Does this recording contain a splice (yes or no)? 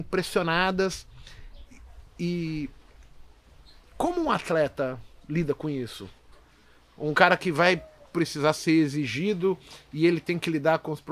no